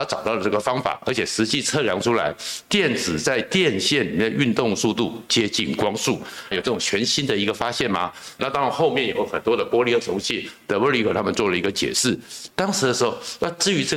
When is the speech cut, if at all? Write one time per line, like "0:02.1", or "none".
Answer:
0:06.5
0:08.4